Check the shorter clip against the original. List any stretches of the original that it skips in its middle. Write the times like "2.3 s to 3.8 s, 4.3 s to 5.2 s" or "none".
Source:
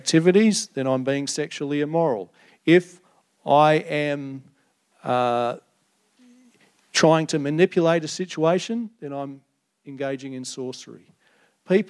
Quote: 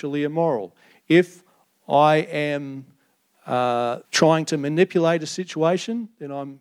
5.6 s to 6.9 s